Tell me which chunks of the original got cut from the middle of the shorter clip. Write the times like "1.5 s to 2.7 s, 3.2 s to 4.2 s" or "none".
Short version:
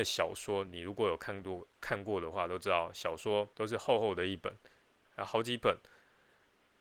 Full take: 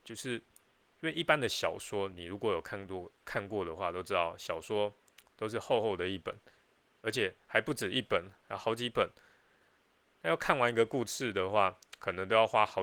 5.0 s to 5.3 s, 6.9 s to 8.4 s